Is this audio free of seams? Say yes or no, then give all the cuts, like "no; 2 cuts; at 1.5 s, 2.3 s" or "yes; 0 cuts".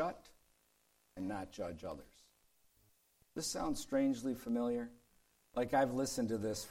yes; 0 cuts